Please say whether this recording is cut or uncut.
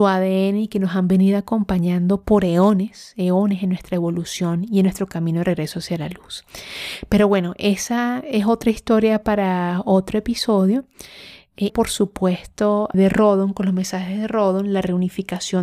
cut